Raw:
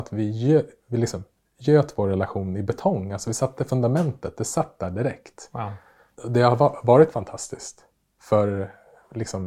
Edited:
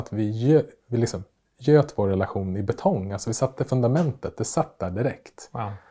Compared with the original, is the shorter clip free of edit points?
yes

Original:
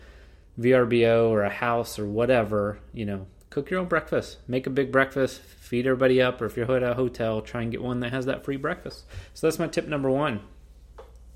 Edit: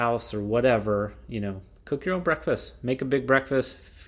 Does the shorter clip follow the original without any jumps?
yes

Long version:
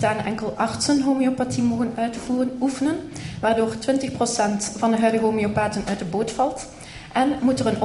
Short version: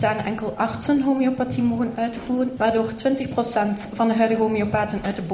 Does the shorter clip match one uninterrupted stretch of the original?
no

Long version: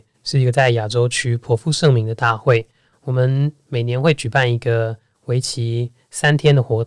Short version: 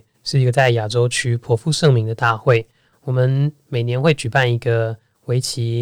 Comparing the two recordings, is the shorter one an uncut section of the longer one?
yes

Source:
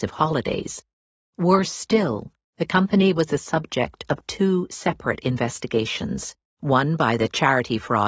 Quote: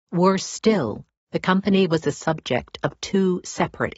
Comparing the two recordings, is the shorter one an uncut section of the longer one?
yes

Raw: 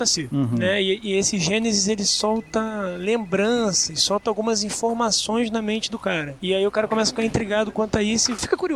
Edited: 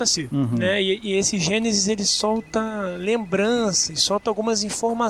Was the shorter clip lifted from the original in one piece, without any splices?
yes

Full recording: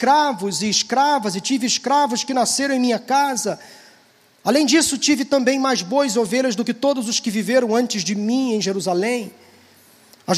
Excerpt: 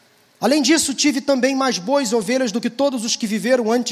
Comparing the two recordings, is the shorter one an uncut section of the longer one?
yes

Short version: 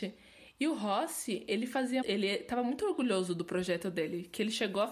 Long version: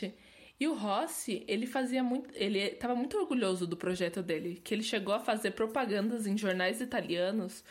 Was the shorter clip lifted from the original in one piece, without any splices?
no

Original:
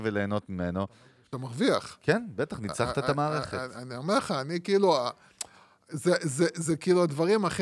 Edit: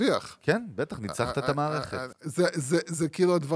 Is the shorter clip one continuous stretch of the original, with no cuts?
no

